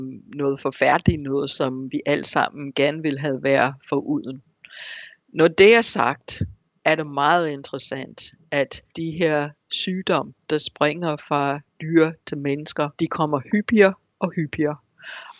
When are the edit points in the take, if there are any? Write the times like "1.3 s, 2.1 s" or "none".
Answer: 8.9 s, 11.7 s, 12.9 s